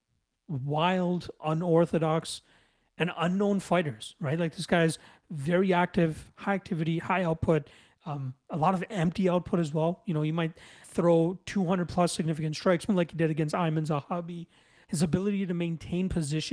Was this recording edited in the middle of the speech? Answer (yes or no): yes